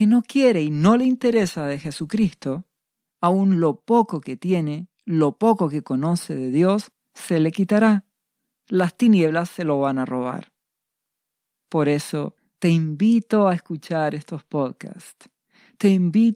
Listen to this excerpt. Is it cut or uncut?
uncut